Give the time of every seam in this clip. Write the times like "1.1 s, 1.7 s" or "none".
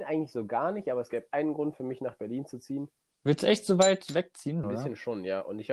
3.1 s, 4.6 s